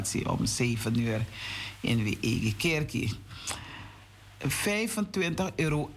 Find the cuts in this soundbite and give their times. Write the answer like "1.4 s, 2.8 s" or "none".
4.4 s